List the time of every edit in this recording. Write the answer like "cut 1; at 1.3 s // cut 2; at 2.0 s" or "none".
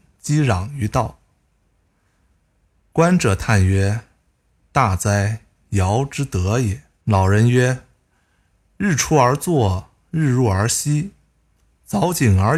cut 1; at 7.0 s